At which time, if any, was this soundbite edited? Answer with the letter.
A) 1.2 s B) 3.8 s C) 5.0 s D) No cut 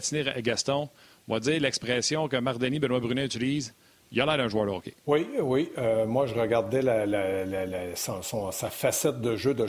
C